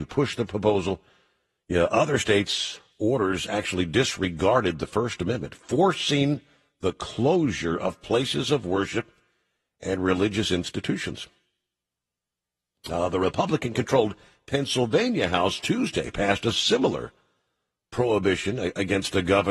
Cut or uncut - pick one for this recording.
cut